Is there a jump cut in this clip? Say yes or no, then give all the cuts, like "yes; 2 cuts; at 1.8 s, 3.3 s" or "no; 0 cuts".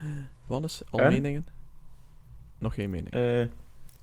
no; 0 cuts